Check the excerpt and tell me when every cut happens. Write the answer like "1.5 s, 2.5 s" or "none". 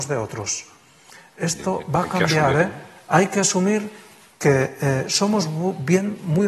none